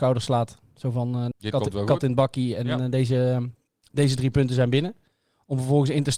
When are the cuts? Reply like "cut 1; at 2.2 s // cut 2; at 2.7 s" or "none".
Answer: cut 1; at 1.3 s